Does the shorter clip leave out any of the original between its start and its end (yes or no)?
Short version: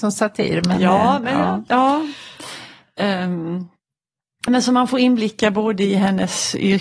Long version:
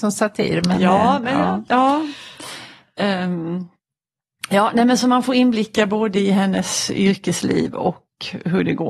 yes